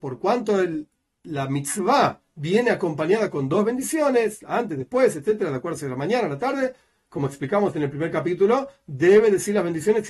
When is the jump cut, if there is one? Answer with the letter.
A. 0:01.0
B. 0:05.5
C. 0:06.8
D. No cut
D